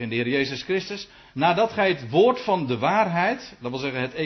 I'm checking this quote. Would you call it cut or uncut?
uncut